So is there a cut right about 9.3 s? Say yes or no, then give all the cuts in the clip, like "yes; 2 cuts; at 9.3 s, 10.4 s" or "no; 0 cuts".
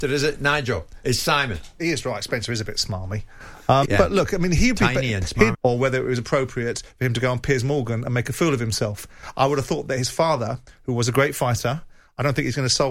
no; 3 cuts; at 1.8 s, 3.8 s, 5.5 s